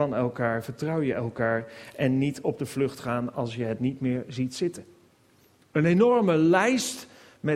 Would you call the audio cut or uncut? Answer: uncut